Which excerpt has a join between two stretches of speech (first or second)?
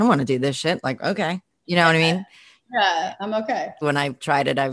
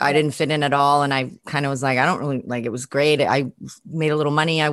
first